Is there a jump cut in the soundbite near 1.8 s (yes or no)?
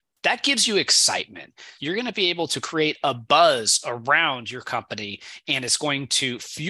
yes